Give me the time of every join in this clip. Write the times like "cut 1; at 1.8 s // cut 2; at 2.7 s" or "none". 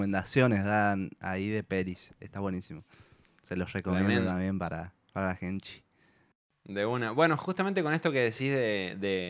none